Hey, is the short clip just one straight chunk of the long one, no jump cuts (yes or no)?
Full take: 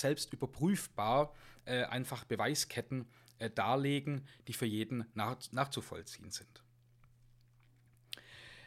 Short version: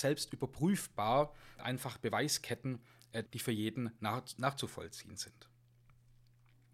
no